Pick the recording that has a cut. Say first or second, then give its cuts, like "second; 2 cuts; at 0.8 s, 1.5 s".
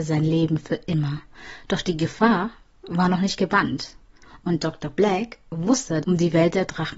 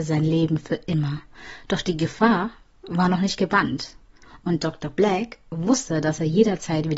first; 1 cut; at 6.0 s